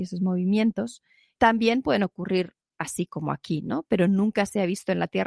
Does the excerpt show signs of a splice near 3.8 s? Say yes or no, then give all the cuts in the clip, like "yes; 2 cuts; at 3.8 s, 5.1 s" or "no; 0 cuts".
no; 1 cut; at 1.4 s